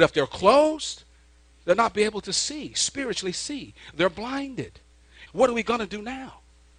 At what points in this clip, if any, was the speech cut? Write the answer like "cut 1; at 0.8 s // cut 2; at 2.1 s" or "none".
cut 1; at 5.3 s